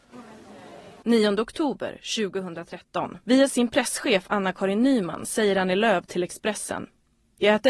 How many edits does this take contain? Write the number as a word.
zero